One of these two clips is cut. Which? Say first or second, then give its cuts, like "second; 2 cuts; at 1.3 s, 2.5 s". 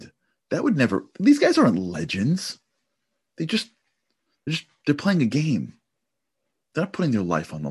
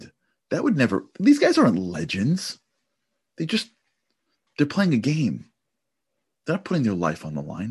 second; 1 cut; at 4.5 s